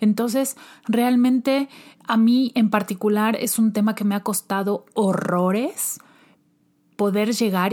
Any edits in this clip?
no; 0 cuts

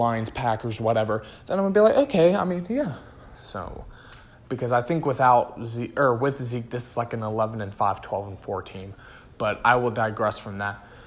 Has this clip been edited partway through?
yes; 1 cut; at 3.3 s

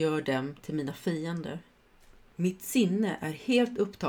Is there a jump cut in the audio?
yes; 1 cut; at 2.3 s

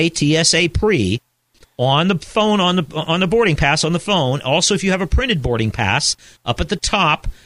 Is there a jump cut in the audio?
no; 0 cuts

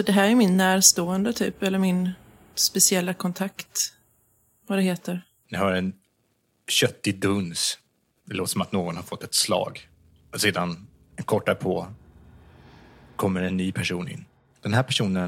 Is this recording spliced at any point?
yes; 1 cut; at 5.4 s

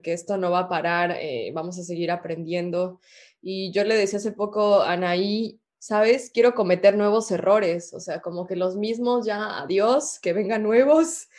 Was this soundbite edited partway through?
no; 0 cuts

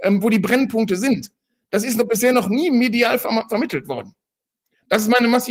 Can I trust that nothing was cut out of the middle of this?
yes; 0 cuts

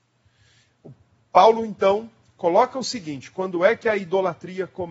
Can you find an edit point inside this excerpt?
no; 0 cuts

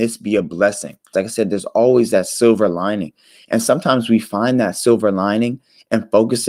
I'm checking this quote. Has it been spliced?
yes; 1 cut; at 1.1 s

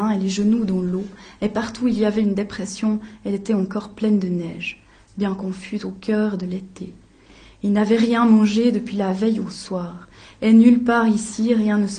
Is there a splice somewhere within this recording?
no; 0 cuts

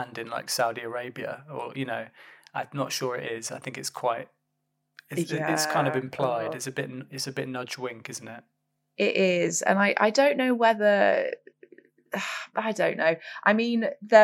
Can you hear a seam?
no; 0 cuts

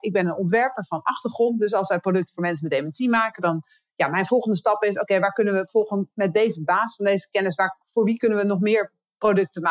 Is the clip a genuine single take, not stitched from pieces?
yes; 0 cuts

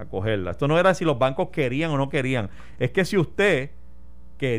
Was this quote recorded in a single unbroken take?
yes; 0 cuts

